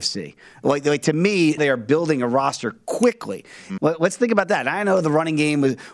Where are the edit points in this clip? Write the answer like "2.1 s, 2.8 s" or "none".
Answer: 1.6 s, 3.8 s